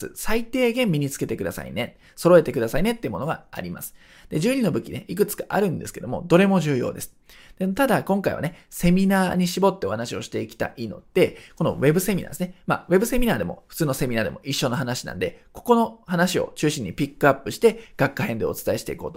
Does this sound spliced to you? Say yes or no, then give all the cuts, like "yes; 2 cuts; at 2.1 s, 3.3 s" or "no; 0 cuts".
no; 0 cuts